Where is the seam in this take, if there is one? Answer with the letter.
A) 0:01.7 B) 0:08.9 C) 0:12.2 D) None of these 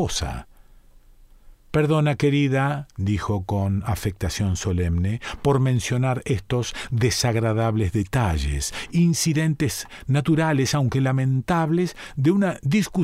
A